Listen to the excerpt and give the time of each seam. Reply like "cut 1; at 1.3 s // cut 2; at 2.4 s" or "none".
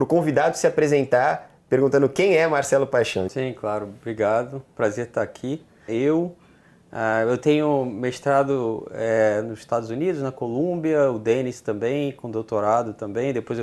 cut 1; at 3.3 s // cut 2; at 5.9 s